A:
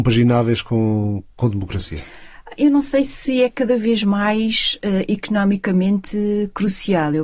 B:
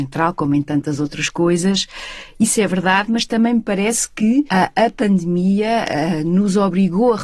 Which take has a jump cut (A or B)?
B